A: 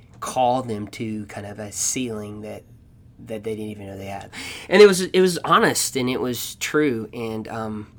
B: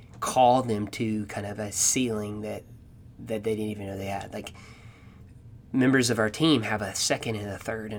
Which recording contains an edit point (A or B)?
A